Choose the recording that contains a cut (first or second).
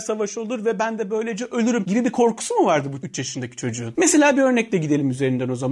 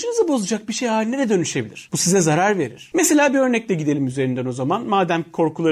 first